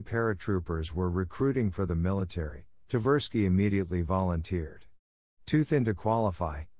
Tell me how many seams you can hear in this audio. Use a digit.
0